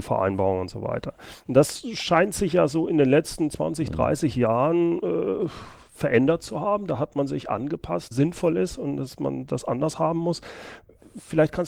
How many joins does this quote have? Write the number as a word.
one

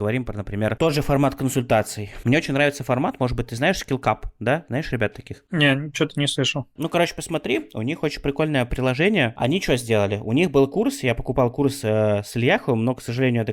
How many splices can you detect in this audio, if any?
one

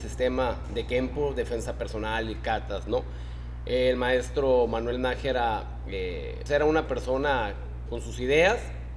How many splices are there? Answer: two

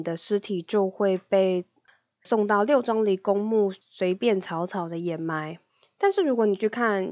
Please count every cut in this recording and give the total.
zero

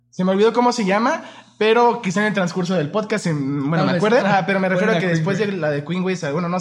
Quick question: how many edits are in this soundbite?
one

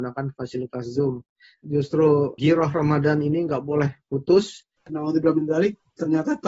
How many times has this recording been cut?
one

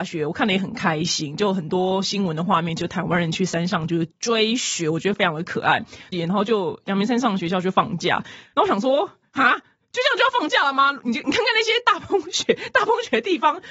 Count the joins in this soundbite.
one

